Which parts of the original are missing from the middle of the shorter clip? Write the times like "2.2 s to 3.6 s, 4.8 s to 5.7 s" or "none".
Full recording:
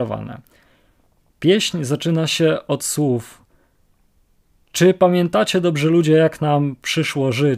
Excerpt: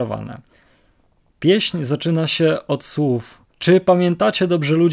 3.5 s to 4.6 s